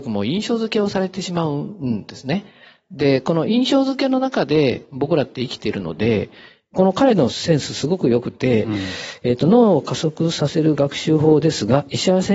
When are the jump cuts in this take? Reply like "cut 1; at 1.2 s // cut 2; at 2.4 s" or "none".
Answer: none